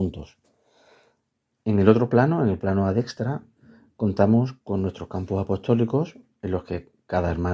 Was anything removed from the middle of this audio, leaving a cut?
yes; 1 cut; at 1.5 s

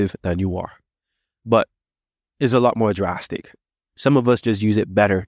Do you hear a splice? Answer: yes; 1 cut; at 3.9 s

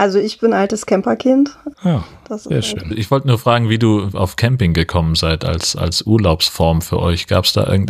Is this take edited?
yes; 3 cuts; at 1.7 s, 2.9 s, 4.1 s

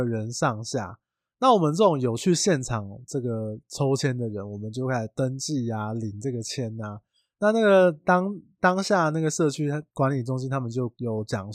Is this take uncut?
yes; 0 cuts

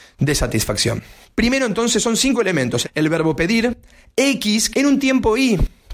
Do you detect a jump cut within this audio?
yes; 2 cuts; at 2.8 s, 4.7 s

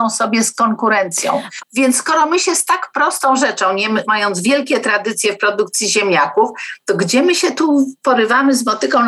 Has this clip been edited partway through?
yes; 2 cuts; at 1.6 s, 4.0 s

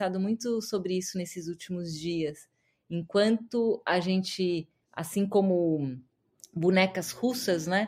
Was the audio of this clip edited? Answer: no; 0 cuts

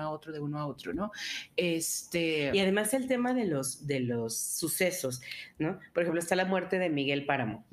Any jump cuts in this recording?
no; 0 cuts

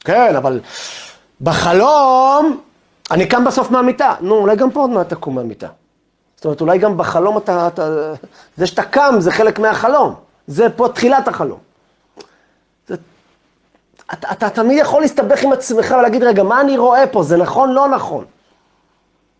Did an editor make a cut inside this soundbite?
no; 0 cuts

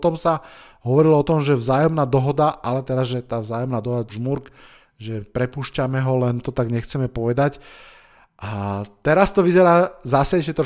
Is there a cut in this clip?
yes; 1 cut; at 4.1 s

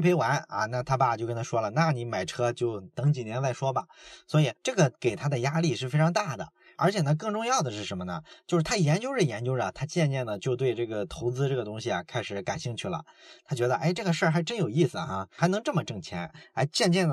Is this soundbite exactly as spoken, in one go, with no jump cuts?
yes; 0 cuts

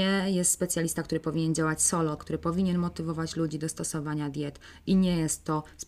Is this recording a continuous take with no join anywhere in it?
no; 1 cut; at 2.2 s

